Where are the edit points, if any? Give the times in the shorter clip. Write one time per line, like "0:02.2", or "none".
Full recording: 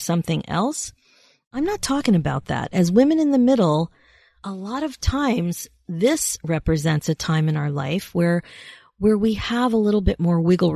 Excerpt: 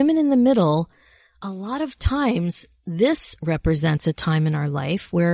none